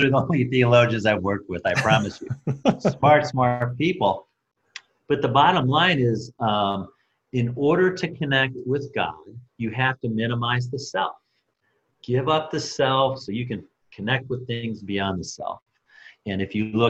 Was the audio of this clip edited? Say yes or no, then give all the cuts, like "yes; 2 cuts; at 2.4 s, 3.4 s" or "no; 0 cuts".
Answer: yes; 2 cuts; at 3.3 s, 9.5 s